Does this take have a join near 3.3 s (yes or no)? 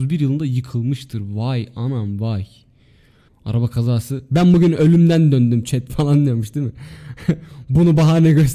yes